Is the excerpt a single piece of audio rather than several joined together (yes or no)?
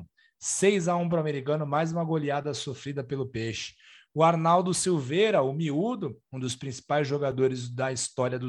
yes